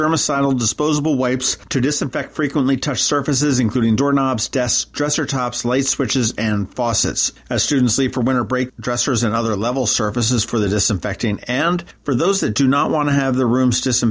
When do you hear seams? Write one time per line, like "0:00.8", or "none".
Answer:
0:07.4
0:08.7